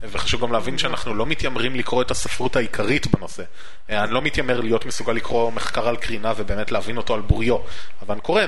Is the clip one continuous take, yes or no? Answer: no